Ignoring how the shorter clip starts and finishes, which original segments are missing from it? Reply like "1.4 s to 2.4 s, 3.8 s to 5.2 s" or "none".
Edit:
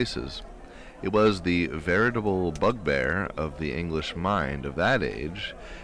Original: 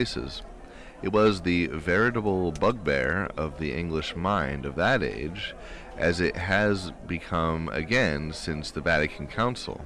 none